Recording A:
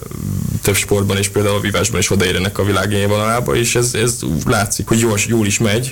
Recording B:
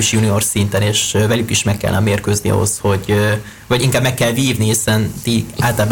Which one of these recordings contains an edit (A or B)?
A